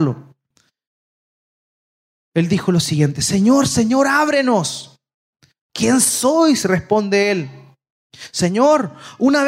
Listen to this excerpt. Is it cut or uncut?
uncut